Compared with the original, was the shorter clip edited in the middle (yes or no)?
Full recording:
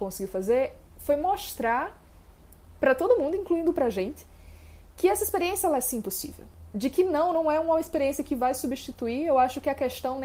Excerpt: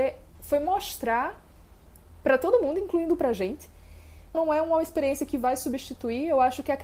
yes